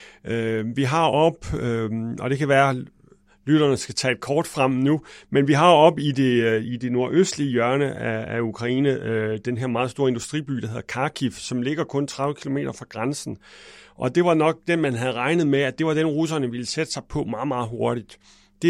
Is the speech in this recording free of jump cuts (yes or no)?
yes